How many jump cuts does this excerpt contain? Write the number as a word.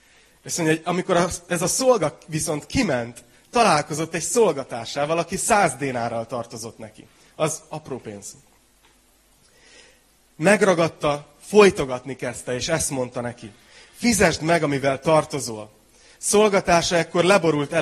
zero